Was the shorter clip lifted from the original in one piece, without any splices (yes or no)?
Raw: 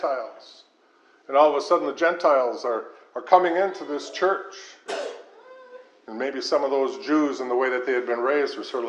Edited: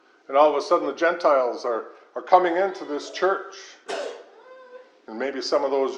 yes